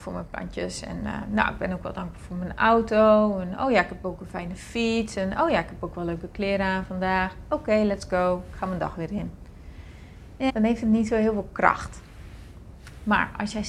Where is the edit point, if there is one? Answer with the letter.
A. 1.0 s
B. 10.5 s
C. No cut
B